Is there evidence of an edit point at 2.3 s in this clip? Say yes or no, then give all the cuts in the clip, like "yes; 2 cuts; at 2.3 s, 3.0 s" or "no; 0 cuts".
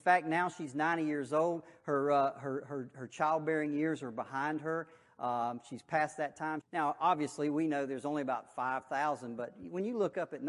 no; 1 cut; at 6.6 s